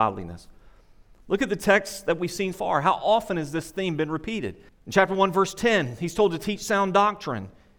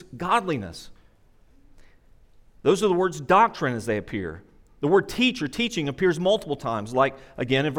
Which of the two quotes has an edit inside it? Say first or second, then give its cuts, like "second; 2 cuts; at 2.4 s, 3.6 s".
first; 2 cuts; at 2.5 s, 4.7 s